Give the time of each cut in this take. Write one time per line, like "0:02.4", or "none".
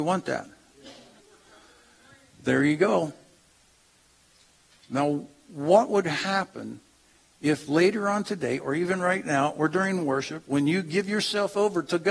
0:01.2